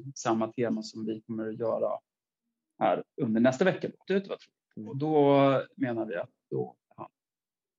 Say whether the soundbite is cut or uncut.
cut